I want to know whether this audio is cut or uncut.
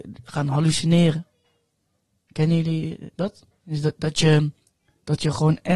uncut